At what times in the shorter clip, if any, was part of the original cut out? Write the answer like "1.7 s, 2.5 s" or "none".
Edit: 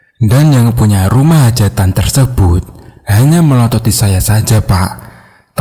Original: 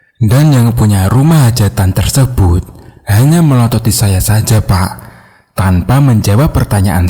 none